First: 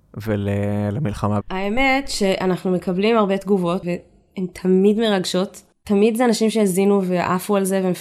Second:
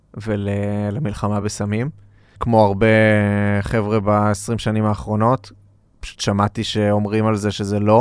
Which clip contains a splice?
first; 2 cuts; at 1.4 s, 3.8 s

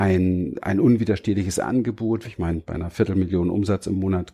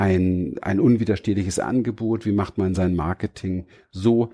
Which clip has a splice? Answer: first; 1 cut; at 2.2 s

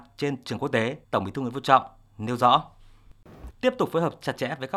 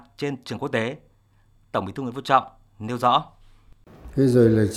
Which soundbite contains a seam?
first; 2 cuts; at 1.0 s, 3.5 s

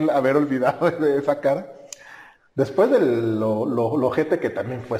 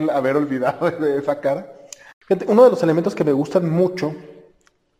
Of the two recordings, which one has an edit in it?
second; 1 cut; at 2.1 s

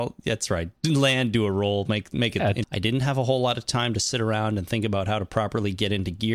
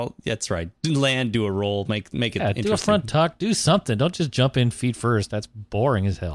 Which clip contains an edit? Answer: first; 1 cut; at 2.6 s

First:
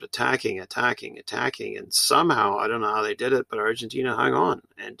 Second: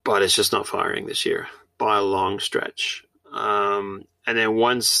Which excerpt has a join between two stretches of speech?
second; 1 cut; at 3.1 s

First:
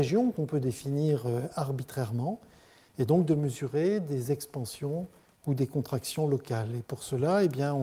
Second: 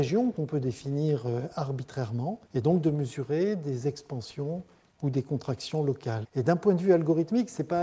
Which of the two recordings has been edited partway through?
second; 2 cuts; at 2.5 s, 6.2 s

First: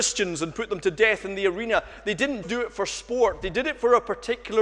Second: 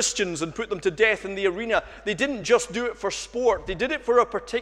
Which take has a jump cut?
first; 1 cut; at 2.4 s

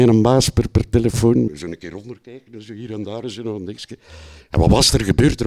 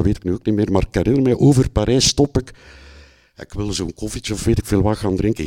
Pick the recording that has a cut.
first; 1 cut; at 1.5 s

